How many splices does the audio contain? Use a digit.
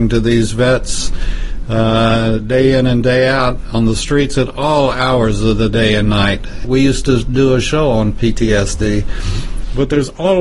1